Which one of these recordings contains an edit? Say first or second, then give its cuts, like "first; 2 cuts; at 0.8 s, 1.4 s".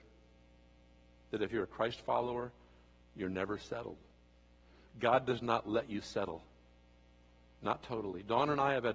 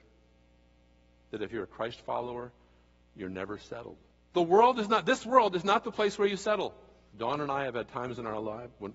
second; 2 cuts; at 4.3 s, 7.1 s